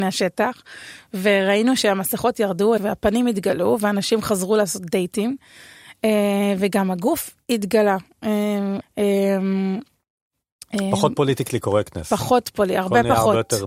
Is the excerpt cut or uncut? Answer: cut